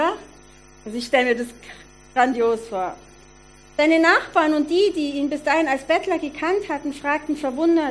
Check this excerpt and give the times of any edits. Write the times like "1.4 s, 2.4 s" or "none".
none

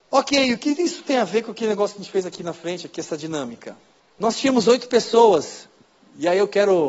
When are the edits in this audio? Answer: 4.0 s

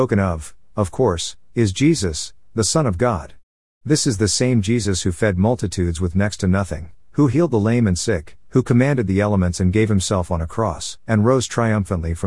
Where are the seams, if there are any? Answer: 8.4 s, 11.0 s

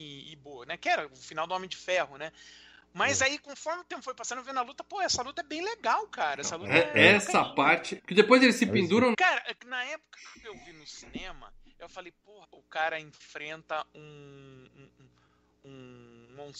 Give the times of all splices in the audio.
8.0 s, 9.1 s, 12.4 s

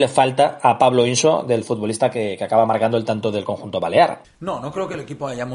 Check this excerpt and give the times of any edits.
4.2 s

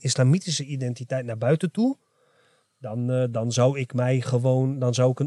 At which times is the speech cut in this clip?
none

